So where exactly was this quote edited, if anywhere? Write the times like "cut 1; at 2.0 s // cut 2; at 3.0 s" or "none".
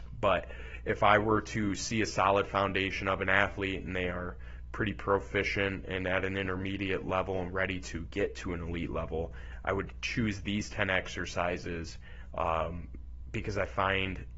none